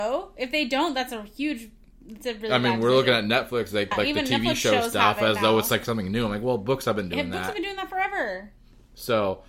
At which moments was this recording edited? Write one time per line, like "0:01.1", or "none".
0:03.9